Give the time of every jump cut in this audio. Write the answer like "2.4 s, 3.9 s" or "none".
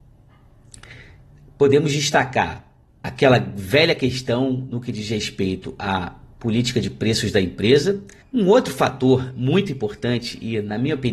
2.9 s, 8.2 s